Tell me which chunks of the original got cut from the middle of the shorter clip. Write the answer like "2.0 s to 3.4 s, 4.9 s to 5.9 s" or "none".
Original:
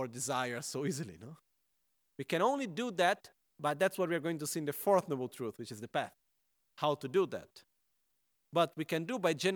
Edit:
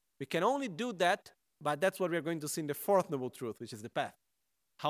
none